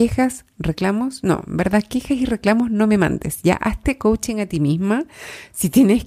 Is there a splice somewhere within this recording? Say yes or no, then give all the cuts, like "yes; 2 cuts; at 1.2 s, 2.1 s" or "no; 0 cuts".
no; 0 cuts